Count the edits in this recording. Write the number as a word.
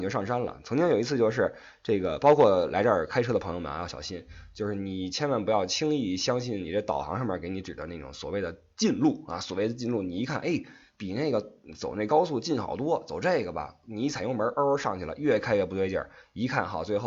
zero